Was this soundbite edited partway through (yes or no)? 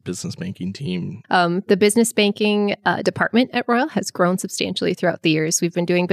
yes